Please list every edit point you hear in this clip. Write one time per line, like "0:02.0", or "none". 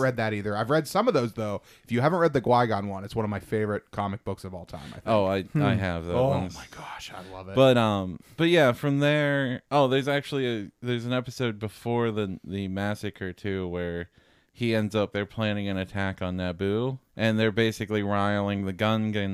0:15.1
0:17.1